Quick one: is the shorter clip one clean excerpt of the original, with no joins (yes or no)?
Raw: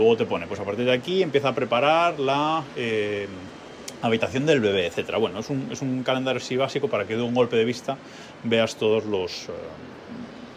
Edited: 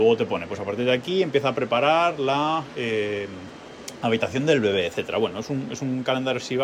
yes